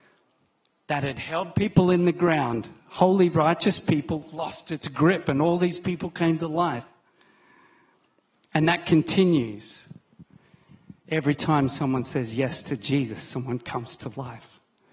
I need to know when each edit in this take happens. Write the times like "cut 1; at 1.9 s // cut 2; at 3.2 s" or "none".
none

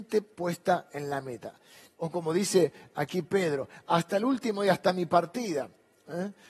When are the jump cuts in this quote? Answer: cut 1; at 2.0 s

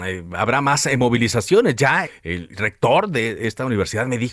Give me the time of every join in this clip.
cut 1; at 2.1 s

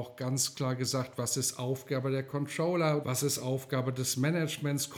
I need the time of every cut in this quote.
cut 1; at 3.0 s

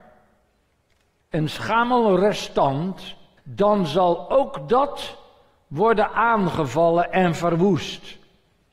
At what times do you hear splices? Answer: cut 1; at 3.4 s

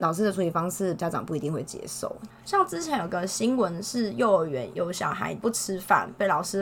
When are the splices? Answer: none

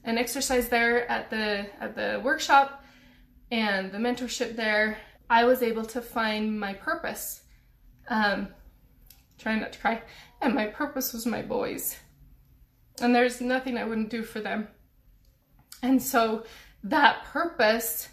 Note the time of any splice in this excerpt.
cut 1; at 5.2 s

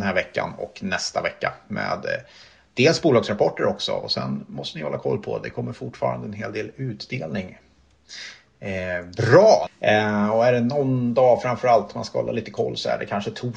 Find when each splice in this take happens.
cut 1; at 9.7 s

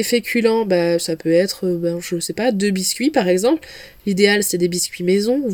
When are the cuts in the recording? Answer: none

